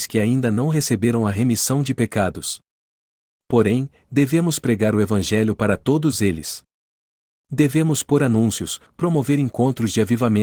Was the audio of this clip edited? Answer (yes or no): yes